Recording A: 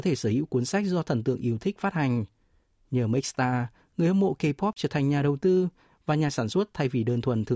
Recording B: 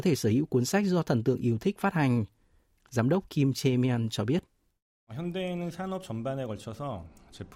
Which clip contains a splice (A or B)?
B